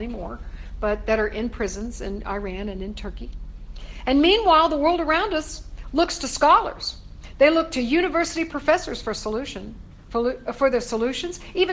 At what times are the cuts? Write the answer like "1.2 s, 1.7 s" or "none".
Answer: none